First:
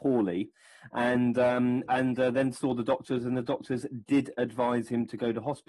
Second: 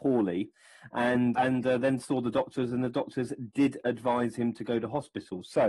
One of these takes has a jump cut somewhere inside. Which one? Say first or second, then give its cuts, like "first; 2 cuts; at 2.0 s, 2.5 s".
second; 1 cut; at 1.3 s